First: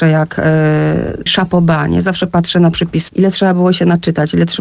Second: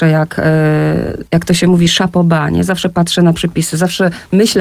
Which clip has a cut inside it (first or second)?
first